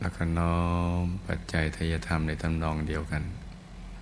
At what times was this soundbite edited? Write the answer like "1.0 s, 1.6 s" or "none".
none

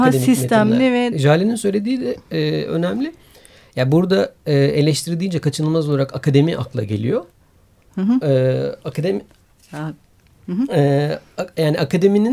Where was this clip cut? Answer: 1.1 s

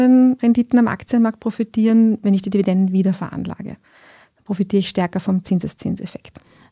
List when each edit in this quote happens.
none

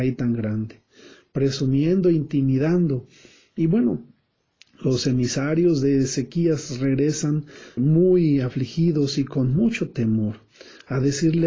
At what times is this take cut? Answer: 7.8 s

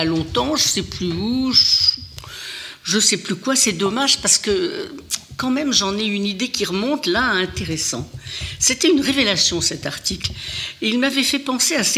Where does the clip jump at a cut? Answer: none

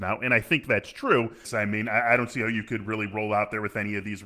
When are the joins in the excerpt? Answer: 1.4 s

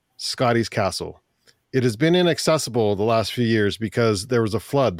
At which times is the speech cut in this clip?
none

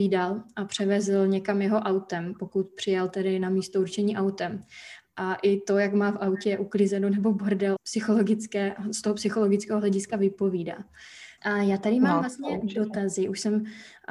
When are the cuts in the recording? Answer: 7.8 s, 11.4 s

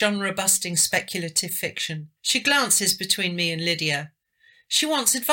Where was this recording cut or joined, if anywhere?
2.2 s

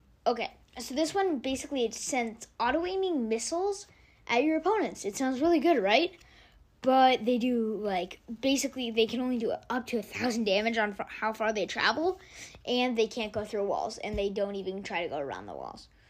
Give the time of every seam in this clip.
none

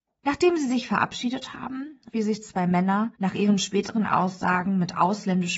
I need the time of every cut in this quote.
2.1 s, 3.1 s

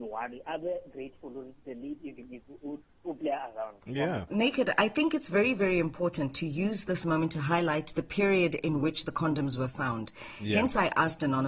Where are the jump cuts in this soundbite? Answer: 4.3 s

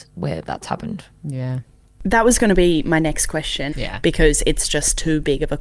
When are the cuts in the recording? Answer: 3.7 s

